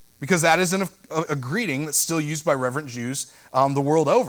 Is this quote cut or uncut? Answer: cut